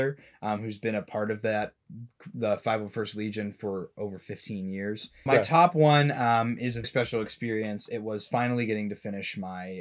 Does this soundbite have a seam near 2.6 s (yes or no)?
no